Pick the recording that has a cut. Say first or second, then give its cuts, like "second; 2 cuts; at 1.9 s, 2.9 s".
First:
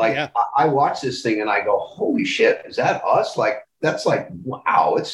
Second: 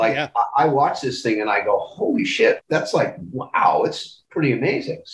second; 1 cut; at 2.6 s